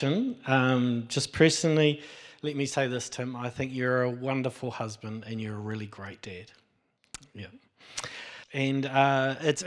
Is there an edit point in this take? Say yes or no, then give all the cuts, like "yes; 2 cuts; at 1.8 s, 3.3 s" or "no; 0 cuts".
yes; 1 cut; at 8.4 s